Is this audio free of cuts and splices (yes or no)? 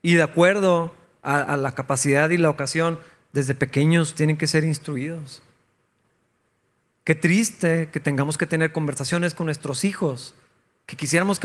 yes